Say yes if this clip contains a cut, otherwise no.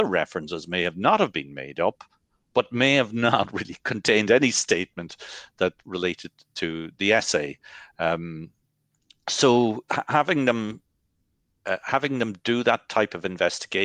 no